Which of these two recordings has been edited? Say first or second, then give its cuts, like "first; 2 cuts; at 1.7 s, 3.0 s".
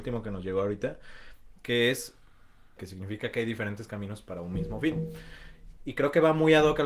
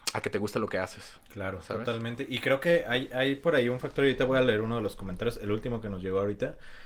first; 2 cuts; at 2.8 s, 5.8 s